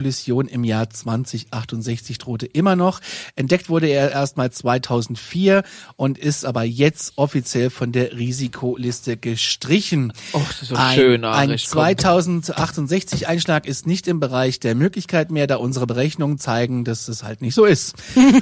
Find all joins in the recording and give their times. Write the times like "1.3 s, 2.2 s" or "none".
none